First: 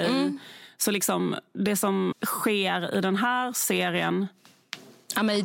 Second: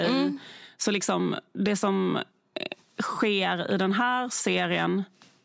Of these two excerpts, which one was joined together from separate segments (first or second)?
first